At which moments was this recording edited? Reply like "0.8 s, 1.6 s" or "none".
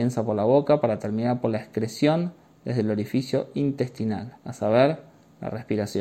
4.4 s